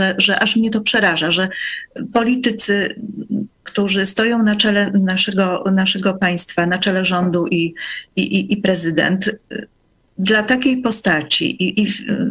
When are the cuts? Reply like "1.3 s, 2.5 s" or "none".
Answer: none